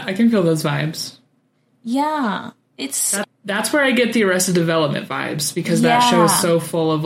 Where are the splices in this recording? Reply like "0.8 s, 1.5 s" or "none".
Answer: 3.2 s